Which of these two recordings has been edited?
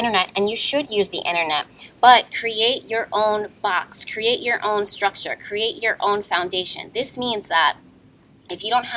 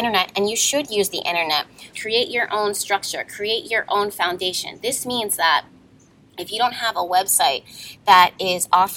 second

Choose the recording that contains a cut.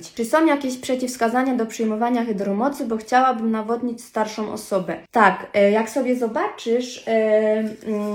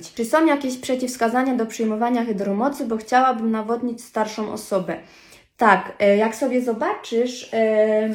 first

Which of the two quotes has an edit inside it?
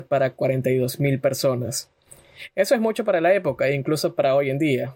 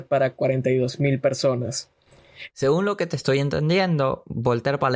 second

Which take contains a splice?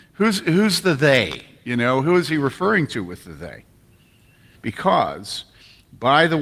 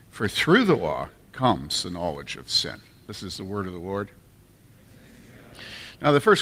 first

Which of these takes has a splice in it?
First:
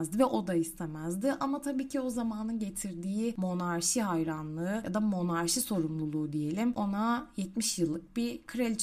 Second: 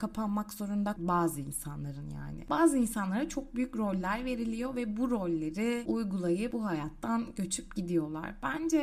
second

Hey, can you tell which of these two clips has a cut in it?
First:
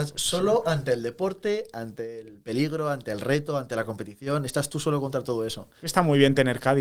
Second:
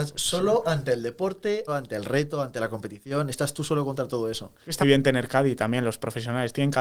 second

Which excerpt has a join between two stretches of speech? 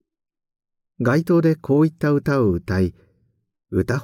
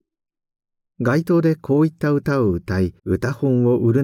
second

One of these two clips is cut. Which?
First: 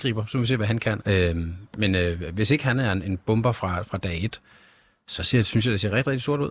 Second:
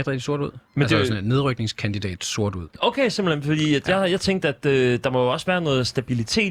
first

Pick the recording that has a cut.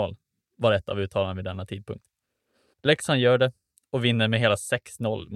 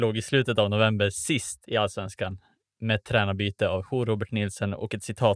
first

